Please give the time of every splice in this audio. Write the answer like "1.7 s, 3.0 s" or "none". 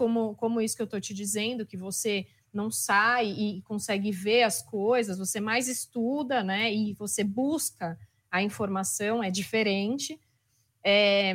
none